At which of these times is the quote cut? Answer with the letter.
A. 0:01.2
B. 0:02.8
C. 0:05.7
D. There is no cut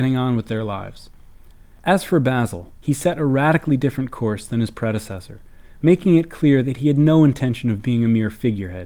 B